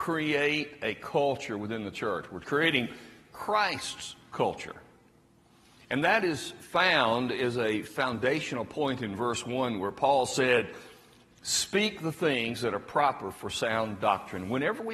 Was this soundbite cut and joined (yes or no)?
no